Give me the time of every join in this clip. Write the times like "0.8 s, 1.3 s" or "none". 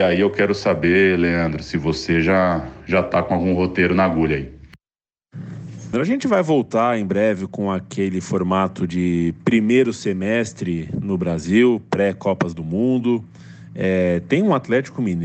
5.9 s

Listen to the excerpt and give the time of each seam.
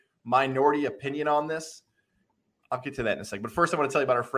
none

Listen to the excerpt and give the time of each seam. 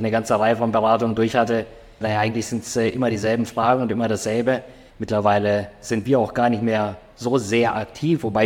2.0 s, 4.9 s

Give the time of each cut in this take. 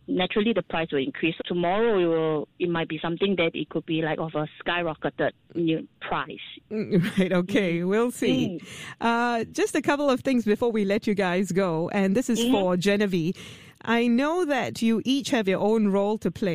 1.4 s

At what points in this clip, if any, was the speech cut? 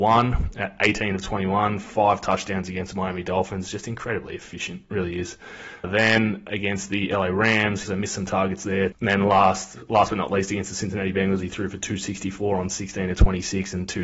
7.8 s, 8.9 s

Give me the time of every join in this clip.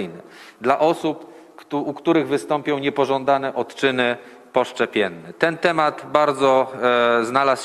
none

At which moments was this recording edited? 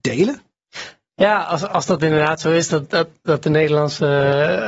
none

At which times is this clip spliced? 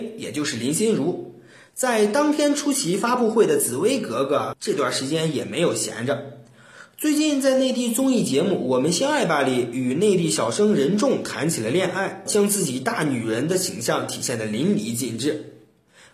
12.3 s

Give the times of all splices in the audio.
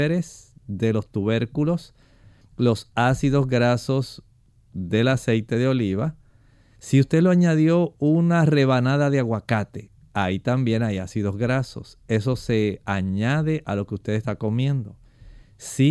none

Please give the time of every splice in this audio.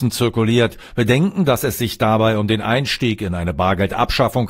0.9 s

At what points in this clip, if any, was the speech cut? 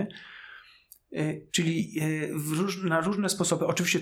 1.5 s

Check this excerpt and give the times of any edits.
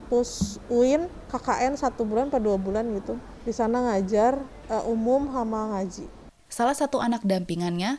6.5 s

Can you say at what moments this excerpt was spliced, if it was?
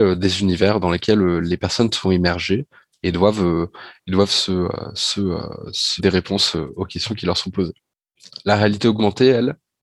6.0 s

